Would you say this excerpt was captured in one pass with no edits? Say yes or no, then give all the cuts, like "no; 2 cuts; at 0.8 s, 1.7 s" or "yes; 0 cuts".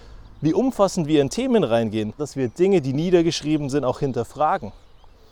no; 1 cut; at 2.2 s